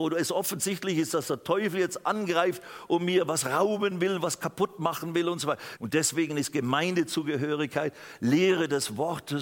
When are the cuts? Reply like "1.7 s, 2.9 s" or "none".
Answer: 5.8 s